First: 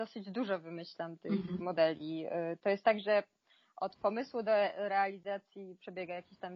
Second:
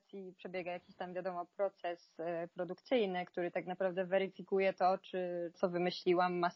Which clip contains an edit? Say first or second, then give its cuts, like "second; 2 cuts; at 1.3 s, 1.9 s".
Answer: second; 1 cut; at 5.5 s